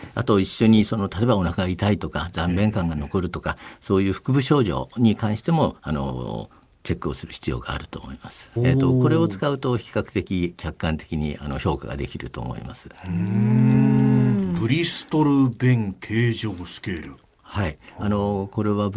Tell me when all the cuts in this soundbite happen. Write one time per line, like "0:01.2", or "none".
0:08.6